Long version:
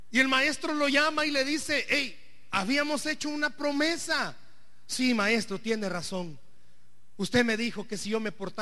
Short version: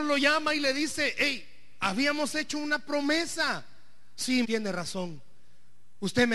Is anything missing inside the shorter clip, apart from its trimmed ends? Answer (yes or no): yes